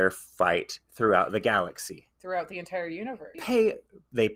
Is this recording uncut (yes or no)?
no